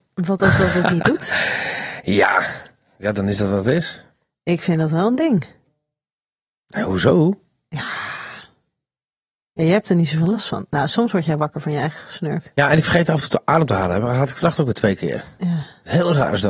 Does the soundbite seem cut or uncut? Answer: uncut